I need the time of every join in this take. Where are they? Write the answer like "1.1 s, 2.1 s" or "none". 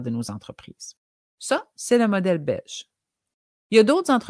1.3 s